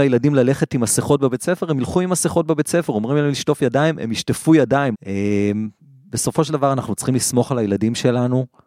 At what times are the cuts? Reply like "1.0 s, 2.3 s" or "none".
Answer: 4.9 s